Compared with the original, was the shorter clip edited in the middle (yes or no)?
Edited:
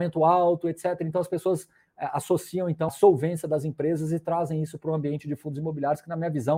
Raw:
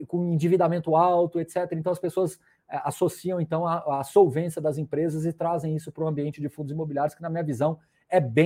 yes